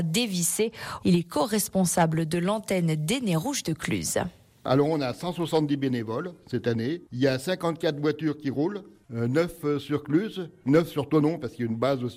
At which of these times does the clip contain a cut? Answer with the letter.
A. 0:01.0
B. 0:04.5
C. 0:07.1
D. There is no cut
A